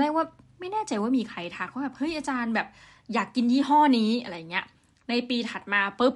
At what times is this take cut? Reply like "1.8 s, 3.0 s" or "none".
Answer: none